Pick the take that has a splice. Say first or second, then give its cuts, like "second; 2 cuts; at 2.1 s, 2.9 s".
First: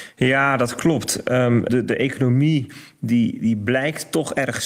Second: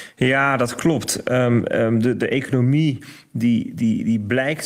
first; 2 cuts; at 1.7 s, 3.4 s